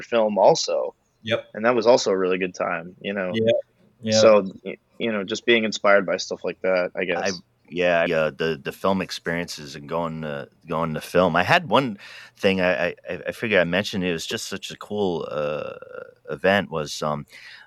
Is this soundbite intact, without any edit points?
no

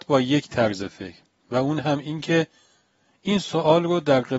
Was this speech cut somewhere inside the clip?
no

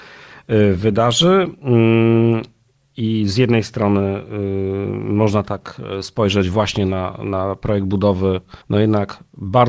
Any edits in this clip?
yes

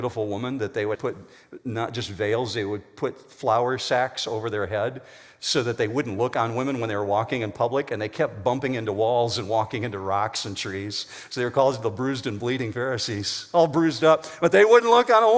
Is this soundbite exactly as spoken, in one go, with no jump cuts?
no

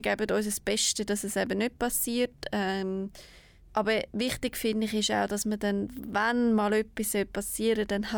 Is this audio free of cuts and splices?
yes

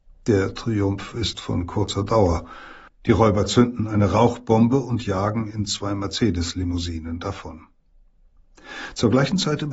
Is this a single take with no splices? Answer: no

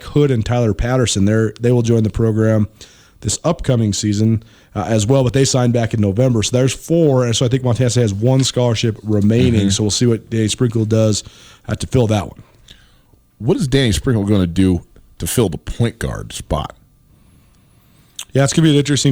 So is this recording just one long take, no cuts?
yes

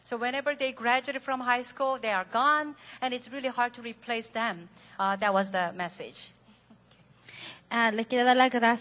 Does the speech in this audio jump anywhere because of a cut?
yes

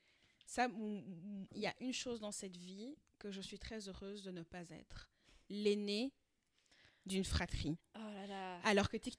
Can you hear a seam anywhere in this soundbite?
yes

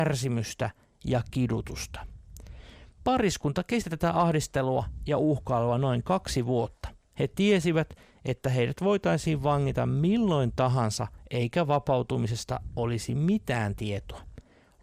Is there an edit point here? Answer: no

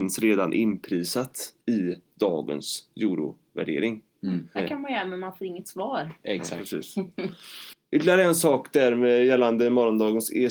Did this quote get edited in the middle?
yes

